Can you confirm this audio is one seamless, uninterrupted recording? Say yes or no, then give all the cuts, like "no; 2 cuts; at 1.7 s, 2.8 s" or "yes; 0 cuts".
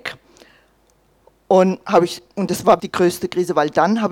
no; 1 cut; at 2.8 s